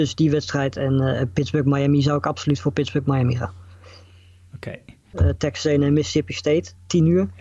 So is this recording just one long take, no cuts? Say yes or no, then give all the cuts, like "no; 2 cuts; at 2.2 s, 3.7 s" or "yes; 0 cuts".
no; 1 cut; at 5.1 s